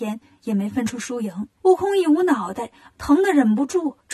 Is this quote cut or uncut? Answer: cut